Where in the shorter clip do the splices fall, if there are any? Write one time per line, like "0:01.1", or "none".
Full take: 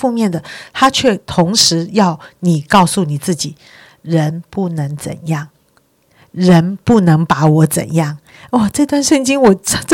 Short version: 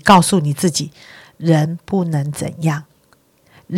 none